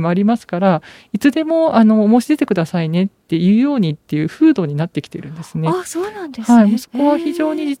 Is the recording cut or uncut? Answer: uncut